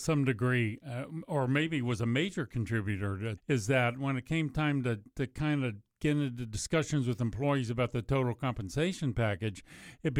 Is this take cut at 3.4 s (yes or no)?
yes